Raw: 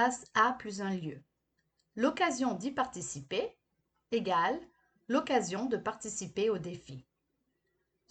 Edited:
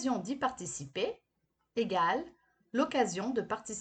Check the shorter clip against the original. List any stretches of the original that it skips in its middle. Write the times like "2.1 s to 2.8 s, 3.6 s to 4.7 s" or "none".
none